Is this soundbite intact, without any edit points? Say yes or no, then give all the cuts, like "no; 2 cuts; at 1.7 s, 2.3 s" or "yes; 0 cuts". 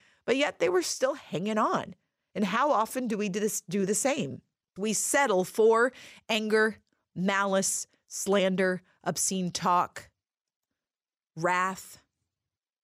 no; 1 cut; at 4.8 s